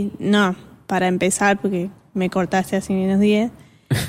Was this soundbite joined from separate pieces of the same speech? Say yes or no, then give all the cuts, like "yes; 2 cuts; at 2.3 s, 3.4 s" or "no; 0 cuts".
no; 0 cuts